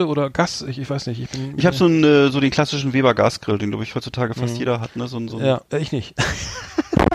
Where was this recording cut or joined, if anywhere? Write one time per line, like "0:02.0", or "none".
none